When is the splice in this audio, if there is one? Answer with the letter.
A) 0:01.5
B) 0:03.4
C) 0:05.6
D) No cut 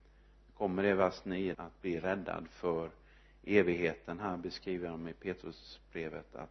A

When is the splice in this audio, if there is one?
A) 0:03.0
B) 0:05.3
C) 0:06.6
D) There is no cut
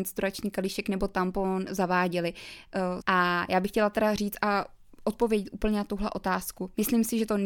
A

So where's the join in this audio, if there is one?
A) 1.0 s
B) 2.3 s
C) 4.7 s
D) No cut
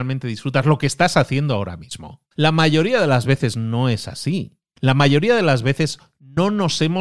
B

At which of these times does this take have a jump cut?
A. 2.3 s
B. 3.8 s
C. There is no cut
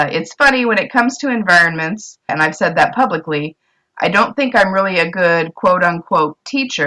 A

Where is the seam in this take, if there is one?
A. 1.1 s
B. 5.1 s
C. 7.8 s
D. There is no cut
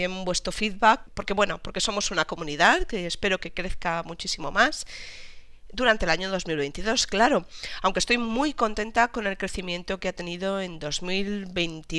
A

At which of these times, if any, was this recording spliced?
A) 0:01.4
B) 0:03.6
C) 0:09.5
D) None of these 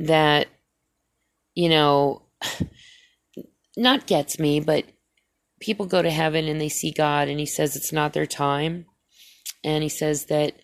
D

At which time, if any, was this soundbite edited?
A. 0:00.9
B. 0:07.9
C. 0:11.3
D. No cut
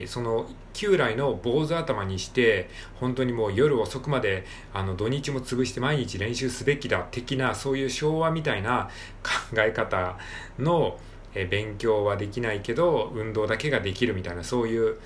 C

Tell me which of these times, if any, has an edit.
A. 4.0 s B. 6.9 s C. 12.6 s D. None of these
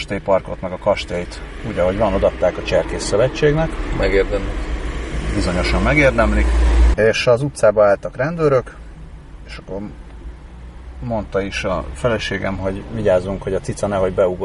B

